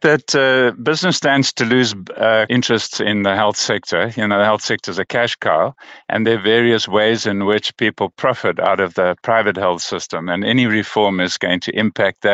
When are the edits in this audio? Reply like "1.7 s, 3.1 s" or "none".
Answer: 2.5 s